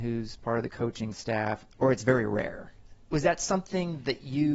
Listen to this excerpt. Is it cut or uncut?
cut